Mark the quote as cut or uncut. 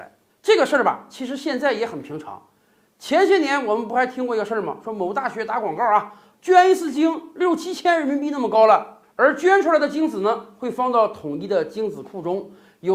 cut